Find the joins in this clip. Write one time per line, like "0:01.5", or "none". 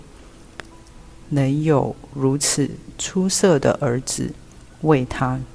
0:01.2